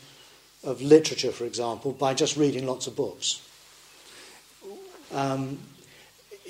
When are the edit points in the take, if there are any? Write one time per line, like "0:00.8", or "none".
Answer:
0:05.0